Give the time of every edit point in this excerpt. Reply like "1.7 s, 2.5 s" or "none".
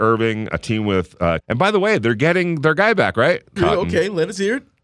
1.4 s, 3.6 s